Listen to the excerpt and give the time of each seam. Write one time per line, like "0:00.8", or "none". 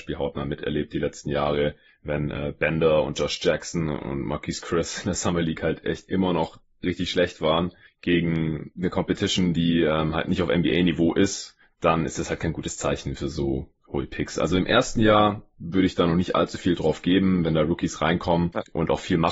none